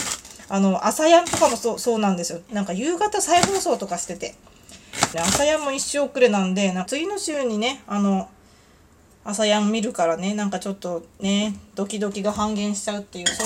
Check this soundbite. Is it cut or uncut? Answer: cut